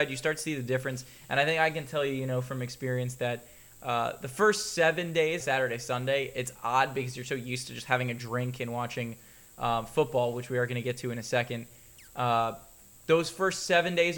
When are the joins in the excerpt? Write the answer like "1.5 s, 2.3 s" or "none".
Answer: 5.4 s